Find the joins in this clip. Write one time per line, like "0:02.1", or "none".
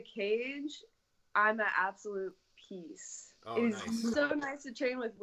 0:04.1

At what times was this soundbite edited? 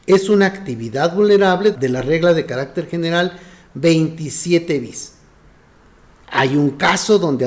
0:01.7

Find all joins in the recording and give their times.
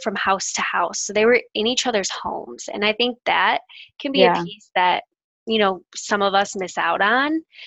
none

